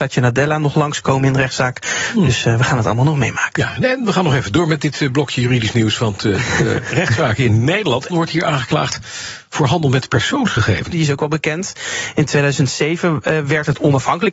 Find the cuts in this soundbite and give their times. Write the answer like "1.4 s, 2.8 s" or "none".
8.1 s, 10.9 s